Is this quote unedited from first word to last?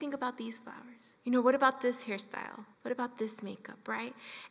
no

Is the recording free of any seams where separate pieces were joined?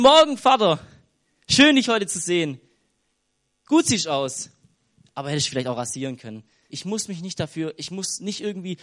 no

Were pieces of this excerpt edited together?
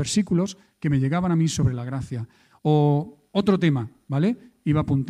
no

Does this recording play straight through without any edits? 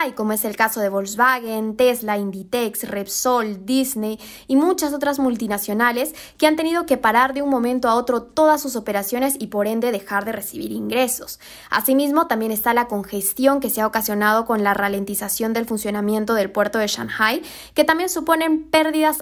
yes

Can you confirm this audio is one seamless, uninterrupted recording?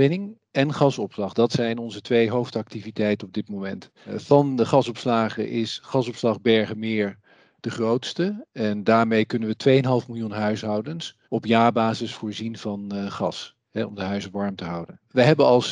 no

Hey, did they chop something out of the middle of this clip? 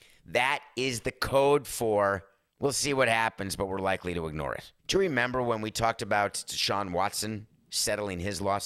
yes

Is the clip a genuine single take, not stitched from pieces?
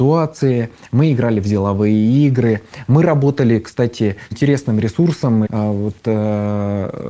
no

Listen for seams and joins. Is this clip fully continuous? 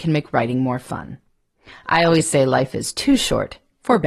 yes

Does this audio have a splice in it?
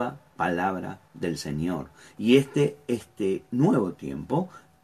yes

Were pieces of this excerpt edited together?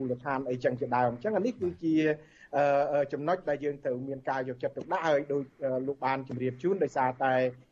no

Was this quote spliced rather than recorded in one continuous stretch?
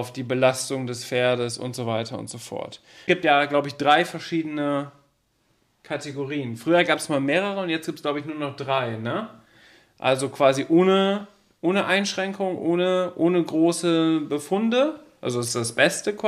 no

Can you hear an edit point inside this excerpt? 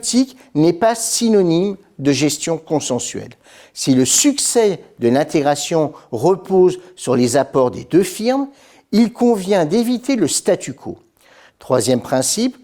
yes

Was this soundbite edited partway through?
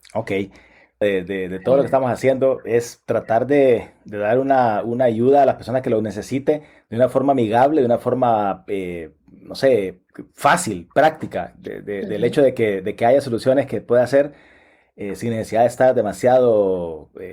yes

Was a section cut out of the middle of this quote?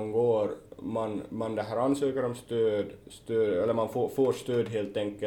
yes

